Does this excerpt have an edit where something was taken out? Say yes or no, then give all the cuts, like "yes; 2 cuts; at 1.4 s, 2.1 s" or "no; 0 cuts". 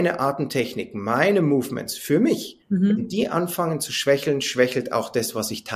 yes; 1 cut; at 2.6 s